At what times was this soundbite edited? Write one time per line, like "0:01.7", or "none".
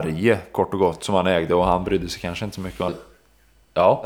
0:02.9